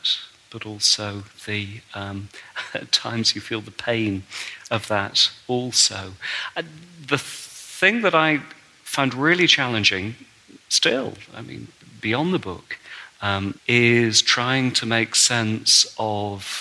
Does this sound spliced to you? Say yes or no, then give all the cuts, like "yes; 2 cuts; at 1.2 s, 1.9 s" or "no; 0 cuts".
yes; 1 cut; at 13.6 s